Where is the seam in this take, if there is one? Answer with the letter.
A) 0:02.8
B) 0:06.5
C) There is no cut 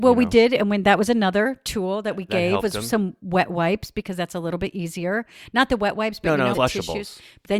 B